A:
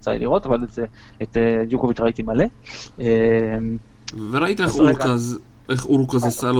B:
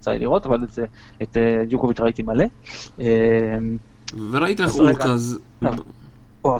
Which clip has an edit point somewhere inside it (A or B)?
B